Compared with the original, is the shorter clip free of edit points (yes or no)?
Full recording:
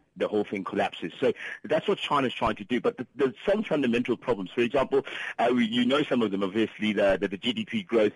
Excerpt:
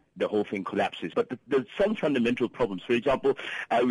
no